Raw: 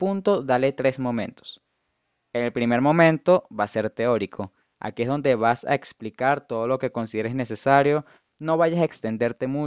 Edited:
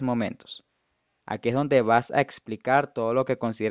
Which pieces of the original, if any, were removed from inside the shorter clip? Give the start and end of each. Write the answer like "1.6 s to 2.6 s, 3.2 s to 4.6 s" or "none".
2.2 s to 4.7 s